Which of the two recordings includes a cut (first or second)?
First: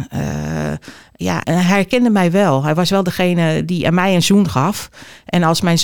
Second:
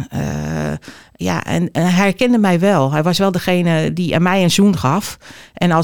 first